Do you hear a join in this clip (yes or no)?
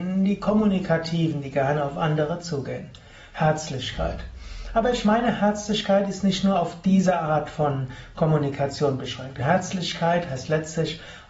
yes